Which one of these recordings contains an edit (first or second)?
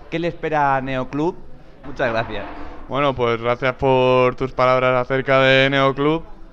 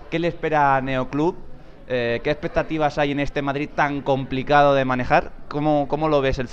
first